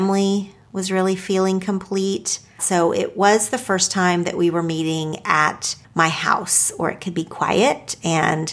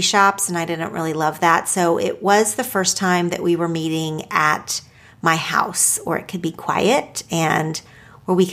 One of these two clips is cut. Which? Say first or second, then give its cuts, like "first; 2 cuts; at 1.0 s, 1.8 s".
first; 2 cuts; at 2.6 s, 5.8 s